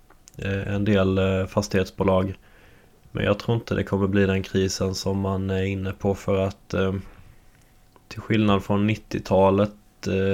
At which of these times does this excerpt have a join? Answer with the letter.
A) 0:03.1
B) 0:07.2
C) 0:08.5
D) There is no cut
D